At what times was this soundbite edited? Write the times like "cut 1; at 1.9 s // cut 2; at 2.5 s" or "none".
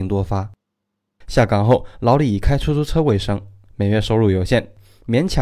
cut 1; at 1.2 s